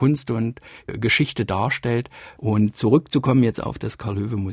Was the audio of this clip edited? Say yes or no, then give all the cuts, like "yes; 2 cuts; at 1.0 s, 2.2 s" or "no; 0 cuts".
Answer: yes; 1 cut; at 2.4 s